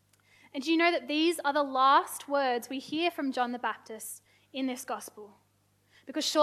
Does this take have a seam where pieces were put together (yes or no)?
no